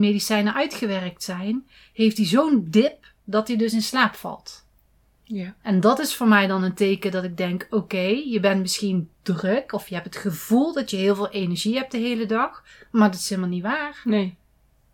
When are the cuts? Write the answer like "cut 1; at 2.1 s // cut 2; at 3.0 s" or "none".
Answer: none